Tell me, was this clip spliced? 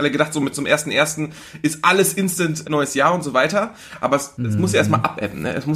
yes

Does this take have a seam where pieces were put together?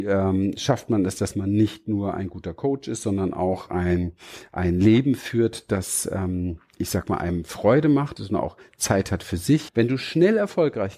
yes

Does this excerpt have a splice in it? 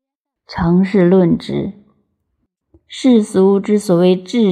no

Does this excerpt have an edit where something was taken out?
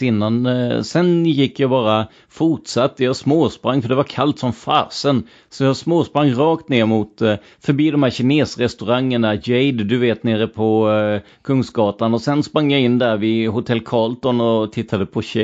no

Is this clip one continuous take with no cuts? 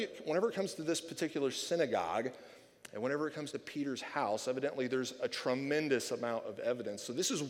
yes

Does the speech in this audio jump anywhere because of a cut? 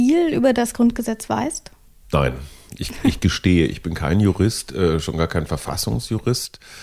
no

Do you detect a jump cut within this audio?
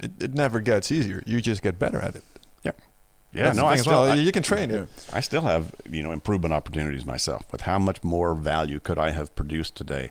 no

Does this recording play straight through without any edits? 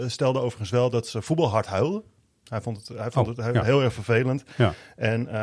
yes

